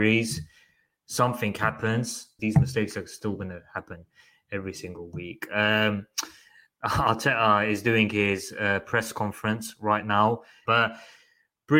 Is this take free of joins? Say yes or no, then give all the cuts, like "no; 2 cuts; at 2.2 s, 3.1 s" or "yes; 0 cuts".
no; 2 cuts; at 2.4 s, 10.7 s